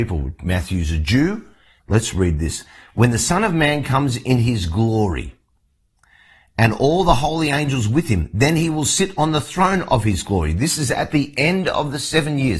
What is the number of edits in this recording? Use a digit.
1